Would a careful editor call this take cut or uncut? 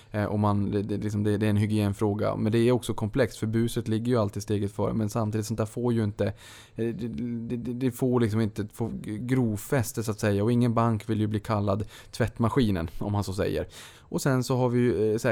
cut